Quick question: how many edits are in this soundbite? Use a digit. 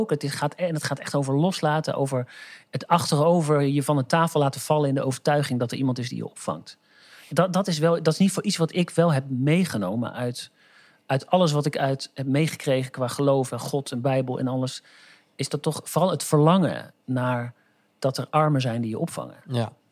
1